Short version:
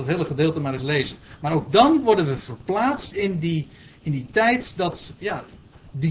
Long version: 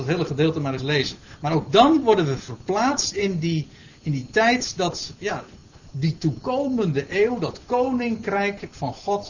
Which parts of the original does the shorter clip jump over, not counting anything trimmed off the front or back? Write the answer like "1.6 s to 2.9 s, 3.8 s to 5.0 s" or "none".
none